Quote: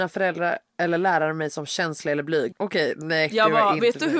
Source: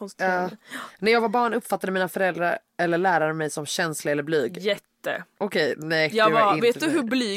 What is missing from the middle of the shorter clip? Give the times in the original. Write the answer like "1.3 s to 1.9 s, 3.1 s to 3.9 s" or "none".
4.5 s to 5.3 s